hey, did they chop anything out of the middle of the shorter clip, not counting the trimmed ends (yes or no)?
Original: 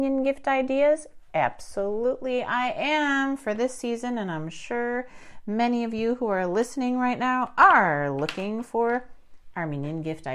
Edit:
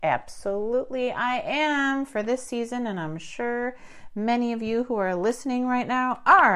no